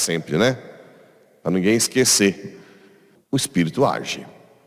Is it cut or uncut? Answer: cut